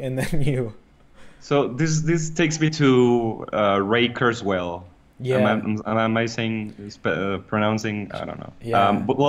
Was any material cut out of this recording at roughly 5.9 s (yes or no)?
no